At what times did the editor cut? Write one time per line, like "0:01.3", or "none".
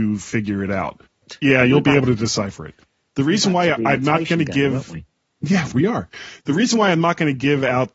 0:01.2
0:05.7